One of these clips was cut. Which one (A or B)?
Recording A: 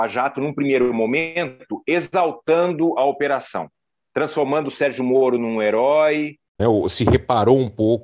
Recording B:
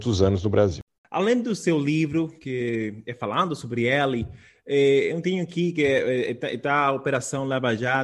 A